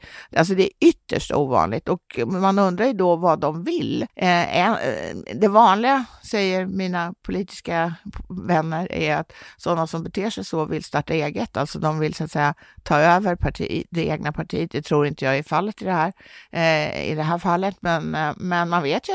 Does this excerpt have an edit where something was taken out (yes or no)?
yes